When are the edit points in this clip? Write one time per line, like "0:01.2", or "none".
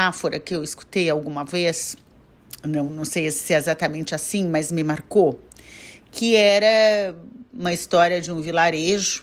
0:02.9